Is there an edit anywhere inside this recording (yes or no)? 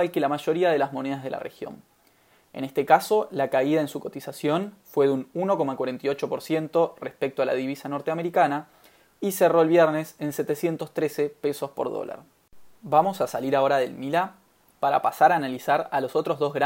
no